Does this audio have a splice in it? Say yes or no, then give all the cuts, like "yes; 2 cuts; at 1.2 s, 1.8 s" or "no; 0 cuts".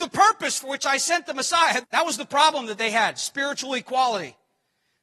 yes; 1 cut; at 1.8 s